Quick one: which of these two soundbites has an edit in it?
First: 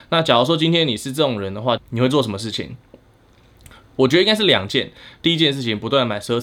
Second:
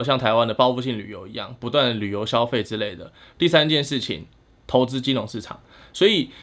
first; 1 cut; at 1.8 s

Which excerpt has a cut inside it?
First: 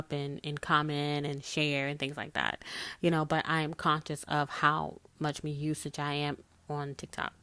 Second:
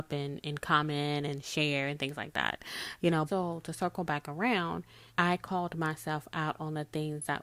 second; 2 cuts; at 3.3 s, 5.1 s

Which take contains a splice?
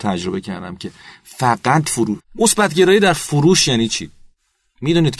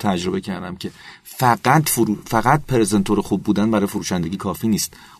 first; 1 cut; at 2.2 s

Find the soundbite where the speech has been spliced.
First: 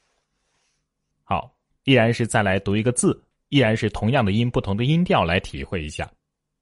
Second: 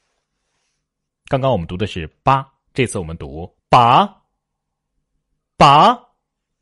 second; 2 cuts; at 1.1 s, 3.6 s

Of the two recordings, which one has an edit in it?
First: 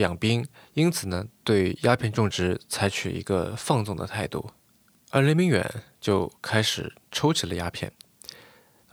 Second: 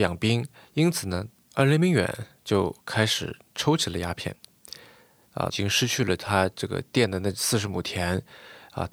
second; 2 cuts; at 1.3 s, 5.5 s

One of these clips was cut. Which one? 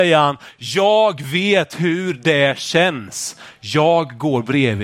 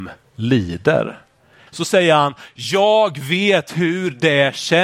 second; 1 cut; at 1.7 s

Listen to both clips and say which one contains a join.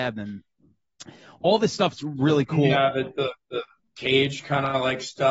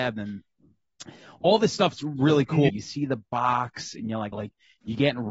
second; 2 cuts; at 2.7 s, 4.3 s

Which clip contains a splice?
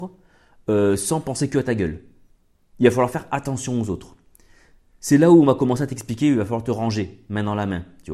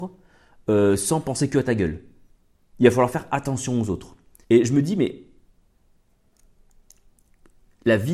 second; 1 cut; at 4.4 s

